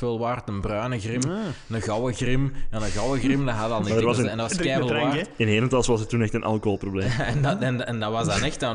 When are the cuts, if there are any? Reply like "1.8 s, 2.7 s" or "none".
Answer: none